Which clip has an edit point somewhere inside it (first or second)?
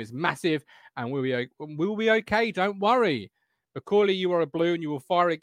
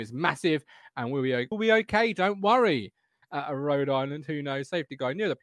second